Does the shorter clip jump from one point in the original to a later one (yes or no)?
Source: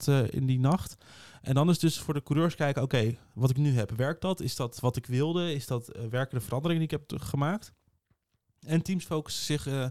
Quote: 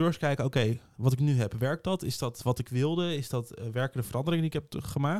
no